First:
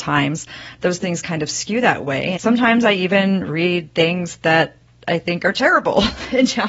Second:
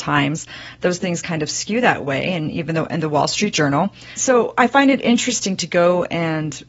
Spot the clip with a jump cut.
first; 1 cut; at 2.4 s

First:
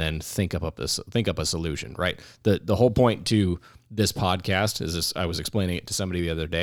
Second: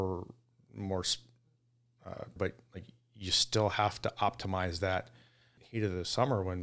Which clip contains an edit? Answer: second; 2 cuts; at 2.4 s, 5.6 s

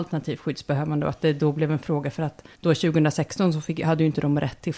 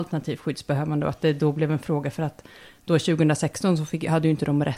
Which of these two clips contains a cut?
first; 1 cut; at 2.5 s

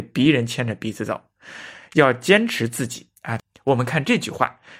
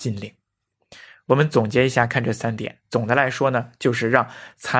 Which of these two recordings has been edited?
first; 1 cut; at 3.4 s

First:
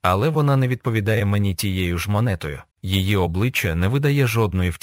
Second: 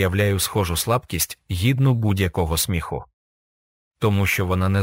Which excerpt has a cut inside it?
first; 1 cut; at 2.7 s

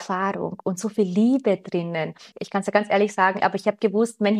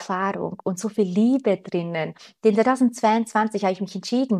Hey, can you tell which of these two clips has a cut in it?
first; 2 cuts; at 2.3 s, 3.4 s

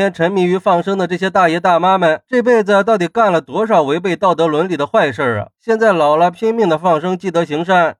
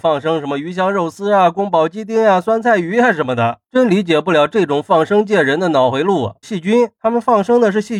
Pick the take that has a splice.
second; 2 cuts; at 3.7 s, 6.4 s

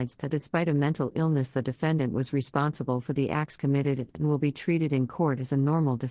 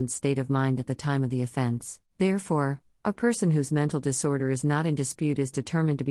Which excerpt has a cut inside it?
second; 1 cut; at 2.1 s

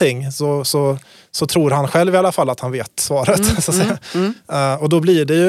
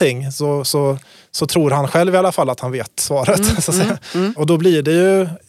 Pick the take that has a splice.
second; 1 cut; at 4.4 s

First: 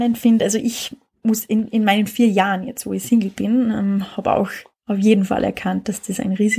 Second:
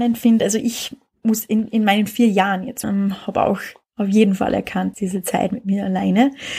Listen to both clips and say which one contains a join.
second; 2 cuts; at 2.8 s, 4.9 s

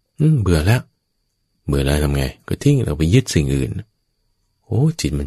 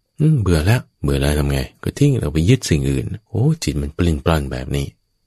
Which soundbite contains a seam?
second; 2 cuts; at 0.9 s, 3.3 s

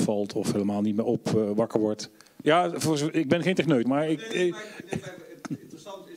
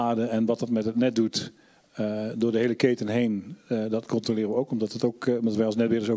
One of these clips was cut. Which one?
first; 2 cuts; at 2.4 s, 3.8 s

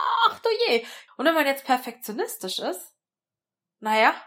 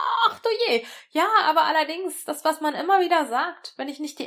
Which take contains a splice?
first; 1 cut; at 1.1 s

